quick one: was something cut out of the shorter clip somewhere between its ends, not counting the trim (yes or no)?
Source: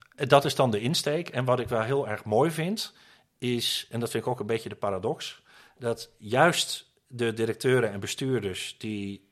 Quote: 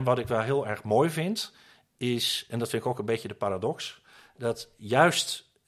no